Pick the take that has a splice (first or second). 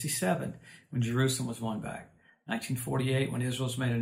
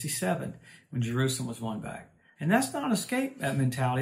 second